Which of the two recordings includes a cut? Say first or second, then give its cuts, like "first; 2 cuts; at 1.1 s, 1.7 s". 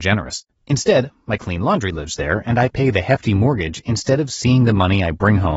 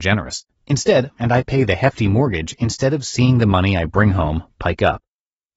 second; 1 cut; at 1.2 s